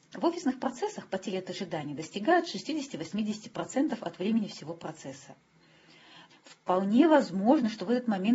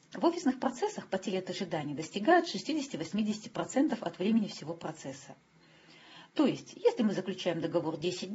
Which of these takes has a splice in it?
first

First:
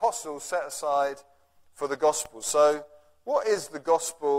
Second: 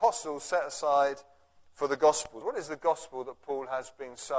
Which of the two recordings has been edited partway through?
second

